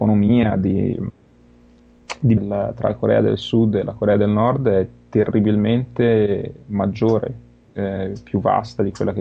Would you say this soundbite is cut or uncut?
cut